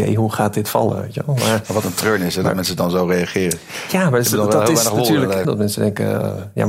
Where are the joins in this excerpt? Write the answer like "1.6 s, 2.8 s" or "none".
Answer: 5.4 s